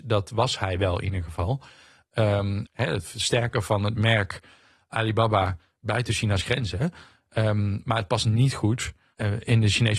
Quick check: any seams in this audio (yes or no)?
yes